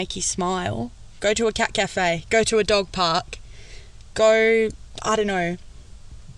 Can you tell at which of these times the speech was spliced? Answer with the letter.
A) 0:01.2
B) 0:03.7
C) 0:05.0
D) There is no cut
A